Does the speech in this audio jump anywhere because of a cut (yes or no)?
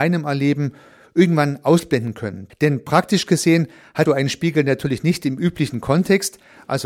yes